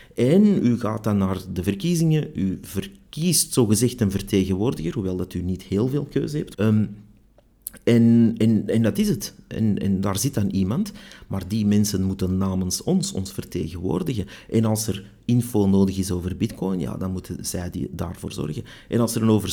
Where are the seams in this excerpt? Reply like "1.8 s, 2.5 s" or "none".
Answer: 6.5 s